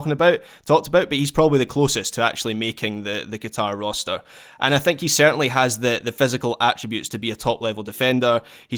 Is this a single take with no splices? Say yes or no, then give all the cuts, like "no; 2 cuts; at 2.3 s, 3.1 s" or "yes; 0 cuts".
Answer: yes; 0 cuts